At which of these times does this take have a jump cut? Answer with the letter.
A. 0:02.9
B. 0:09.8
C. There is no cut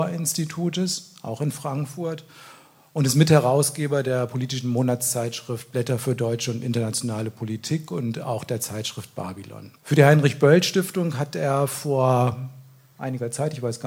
B